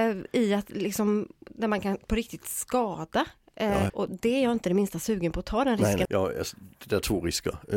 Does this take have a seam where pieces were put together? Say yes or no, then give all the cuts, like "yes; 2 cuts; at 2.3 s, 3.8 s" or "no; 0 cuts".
yes; 2 cuts; at 3.9 s, 6.1 s